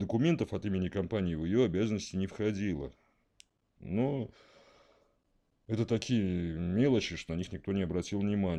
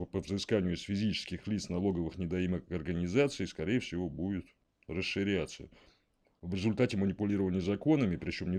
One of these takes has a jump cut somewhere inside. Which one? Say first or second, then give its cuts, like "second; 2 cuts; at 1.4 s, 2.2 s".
first; 2 cuts; at 3.8 s, 7.3 s